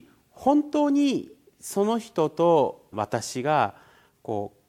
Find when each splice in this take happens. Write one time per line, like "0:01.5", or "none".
0:02.9